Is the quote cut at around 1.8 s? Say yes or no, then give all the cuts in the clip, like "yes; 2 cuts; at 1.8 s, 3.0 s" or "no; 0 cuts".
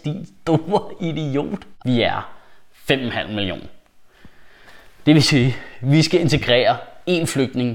yes; 1 cut; at 1.8 s